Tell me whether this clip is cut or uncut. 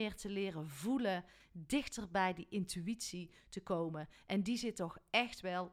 cut